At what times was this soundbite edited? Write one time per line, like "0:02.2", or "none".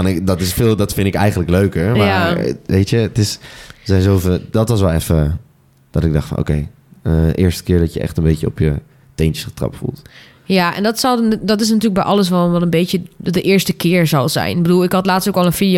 none